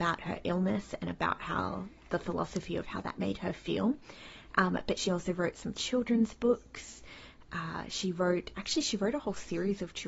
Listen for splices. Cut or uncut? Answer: uncut